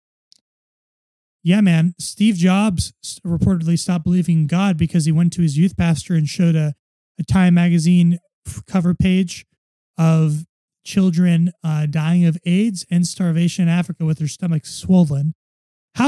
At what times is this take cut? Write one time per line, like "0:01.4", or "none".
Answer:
none